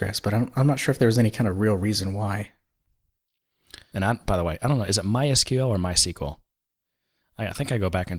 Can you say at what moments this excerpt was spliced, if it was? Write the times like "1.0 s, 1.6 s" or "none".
3.9 s